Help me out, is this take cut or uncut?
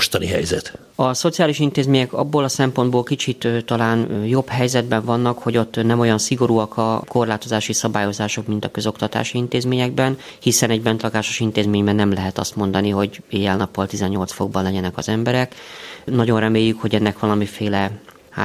cut